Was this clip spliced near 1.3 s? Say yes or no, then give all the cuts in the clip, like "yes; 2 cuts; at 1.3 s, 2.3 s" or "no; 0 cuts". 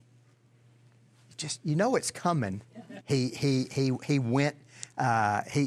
no; 1 cut; at 3.0 s